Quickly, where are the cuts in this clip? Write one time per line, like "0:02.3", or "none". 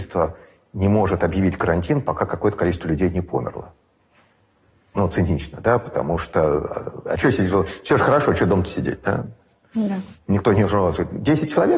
none